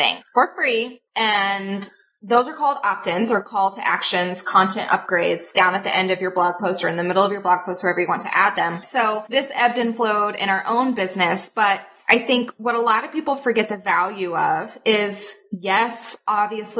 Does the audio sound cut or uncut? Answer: cut